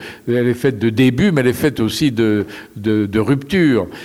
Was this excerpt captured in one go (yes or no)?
yes